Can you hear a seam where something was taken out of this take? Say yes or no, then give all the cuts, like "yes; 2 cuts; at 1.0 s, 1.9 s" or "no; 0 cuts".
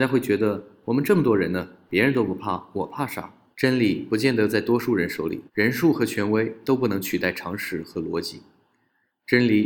yes; 2 cuts; at 3.5 s, 5.5 s